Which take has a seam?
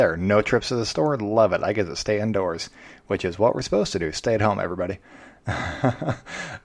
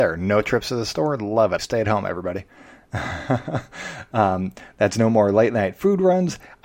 second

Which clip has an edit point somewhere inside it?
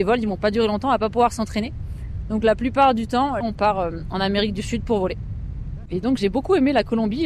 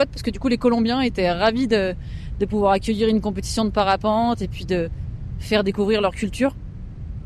first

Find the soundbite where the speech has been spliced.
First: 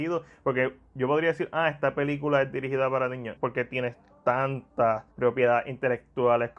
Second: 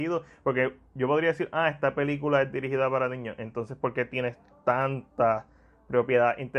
first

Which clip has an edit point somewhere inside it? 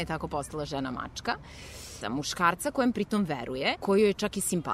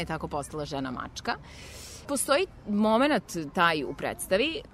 first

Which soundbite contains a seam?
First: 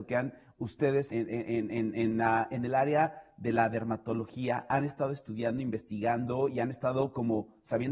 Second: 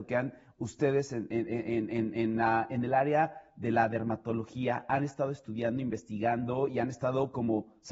first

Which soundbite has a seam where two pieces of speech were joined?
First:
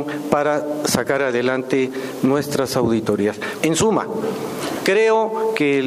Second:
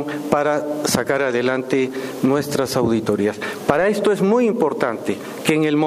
first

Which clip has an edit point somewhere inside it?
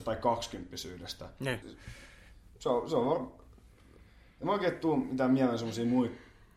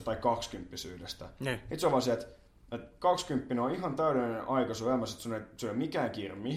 first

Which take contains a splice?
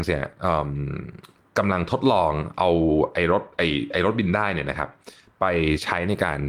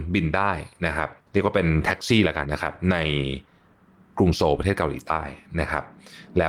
second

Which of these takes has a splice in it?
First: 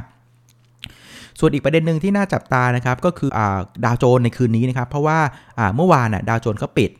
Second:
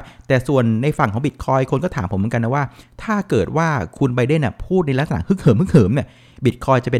first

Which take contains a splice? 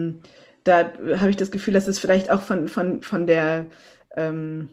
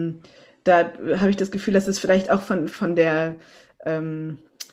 second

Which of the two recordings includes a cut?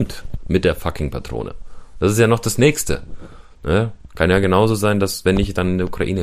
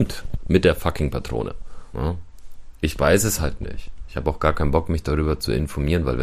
second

